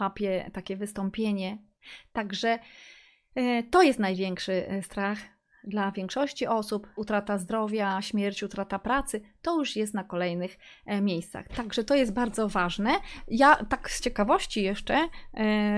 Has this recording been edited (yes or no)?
yes